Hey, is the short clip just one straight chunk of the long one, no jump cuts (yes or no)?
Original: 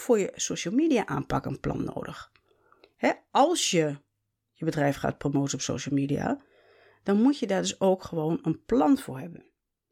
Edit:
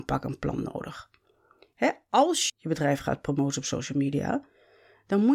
no